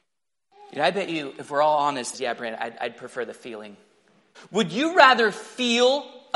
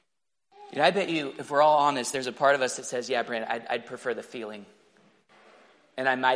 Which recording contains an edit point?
first; 2 cuts; at 2.1 s, 4.3 s

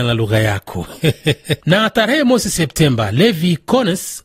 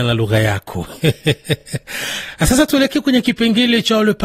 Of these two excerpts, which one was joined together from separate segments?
first; 1 cut; at 1.6 s

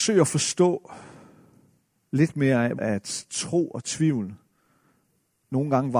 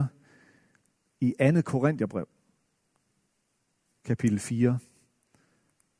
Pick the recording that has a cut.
first; 1 cut; at 2.8 s

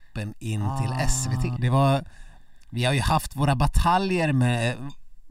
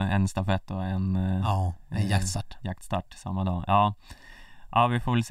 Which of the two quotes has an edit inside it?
first; 1 cut; at 1.6 s

